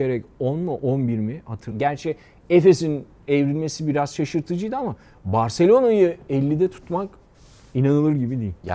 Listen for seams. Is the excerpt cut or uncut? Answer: cut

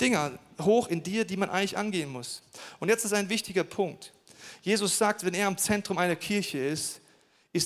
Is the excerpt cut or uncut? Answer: uncut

